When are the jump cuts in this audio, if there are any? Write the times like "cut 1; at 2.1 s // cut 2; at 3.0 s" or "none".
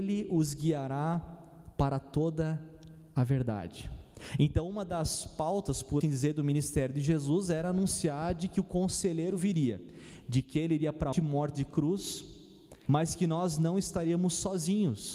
cut 1; at 6.0 s // cut 2; at 11.1 s // cut 3; at 12.9 s

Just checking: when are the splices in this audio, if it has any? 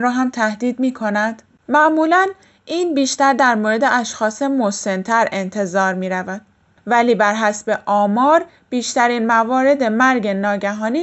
cut 1; at 1.6 s

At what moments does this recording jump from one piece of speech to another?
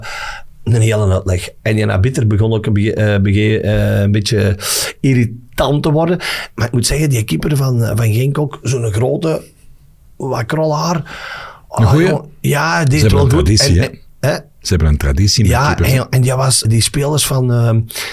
cut 1; at 16.6 s

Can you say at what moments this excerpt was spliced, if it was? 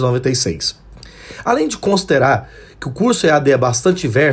none

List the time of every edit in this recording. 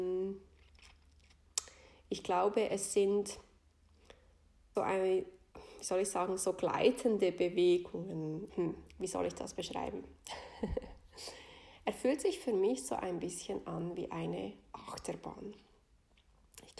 cut 1; at 4.8 s // cut 2; at 8.5 s

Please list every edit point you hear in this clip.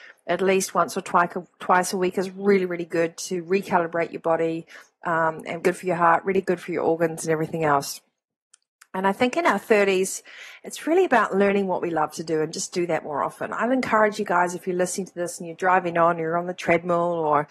cut 1; at 5.6 s

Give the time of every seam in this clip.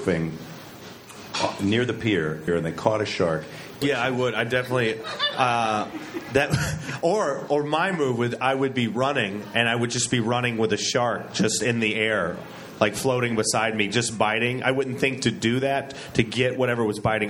cut 1; at 2.5 s // cut 2; at 3.8 s

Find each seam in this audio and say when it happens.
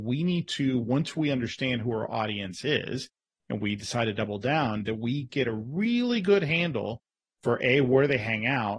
none

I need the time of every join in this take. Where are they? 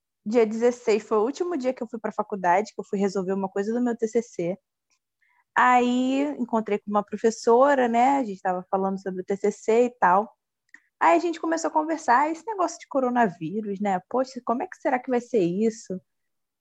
none

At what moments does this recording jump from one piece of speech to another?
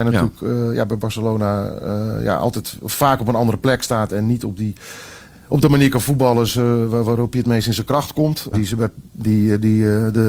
cut 1; at 8.5 s

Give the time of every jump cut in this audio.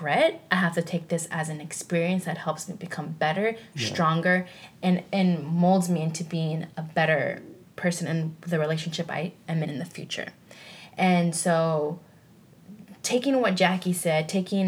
cut 1; at 9.6 s

